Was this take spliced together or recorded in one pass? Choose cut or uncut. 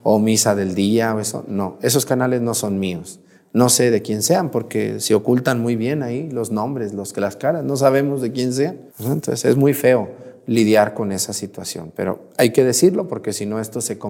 cut